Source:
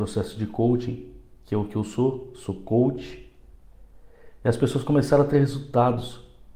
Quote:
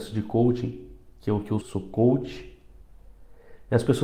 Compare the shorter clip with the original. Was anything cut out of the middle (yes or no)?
yes